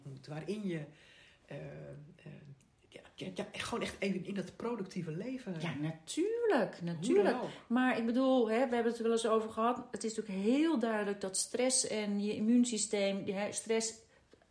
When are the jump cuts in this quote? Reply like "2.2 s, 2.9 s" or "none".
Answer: none

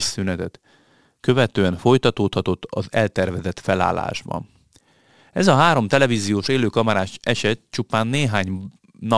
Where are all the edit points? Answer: none

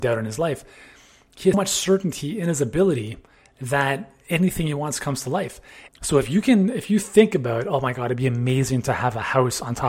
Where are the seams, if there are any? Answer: 1.5 s, 5.9 s

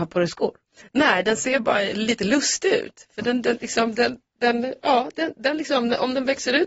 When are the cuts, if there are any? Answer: none

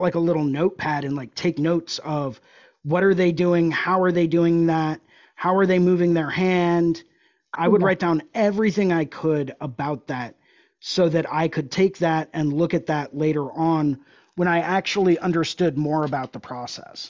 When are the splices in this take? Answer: 7.5 s

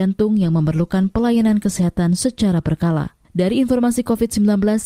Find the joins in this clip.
3.2 s

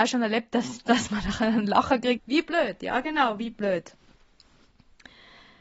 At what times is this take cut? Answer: 2.2 s

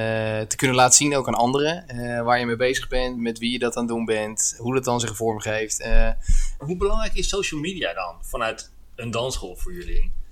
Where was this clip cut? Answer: 6.6 s

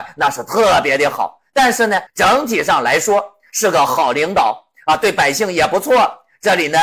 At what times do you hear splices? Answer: 2.1 s

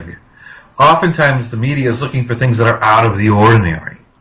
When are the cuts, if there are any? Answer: none

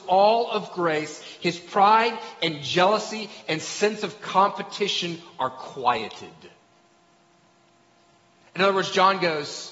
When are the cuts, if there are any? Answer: none

